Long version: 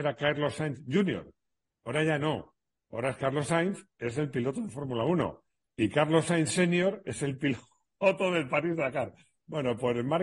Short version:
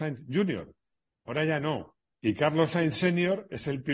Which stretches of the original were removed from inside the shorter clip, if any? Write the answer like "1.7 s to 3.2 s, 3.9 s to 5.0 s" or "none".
2.7 s to 5.7 s

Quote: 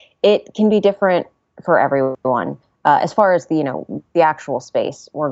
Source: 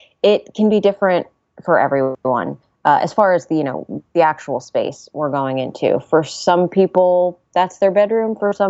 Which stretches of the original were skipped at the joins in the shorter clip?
none

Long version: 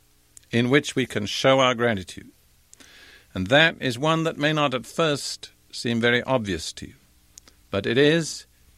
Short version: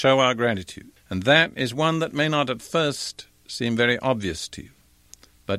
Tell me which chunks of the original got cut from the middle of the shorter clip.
2.4 s to 3.2 s

